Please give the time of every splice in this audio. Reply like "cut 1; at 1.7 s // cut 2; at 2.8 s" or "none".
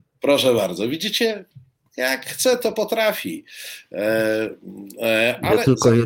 none